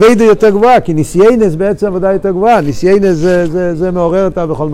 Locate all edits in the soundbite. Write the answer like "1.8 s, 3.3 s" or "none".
none